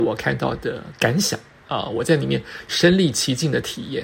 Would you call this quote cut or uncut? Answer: cut